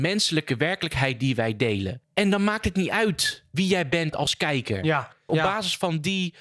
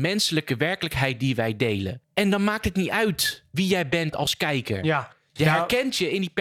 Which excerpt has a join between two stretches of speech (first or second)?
first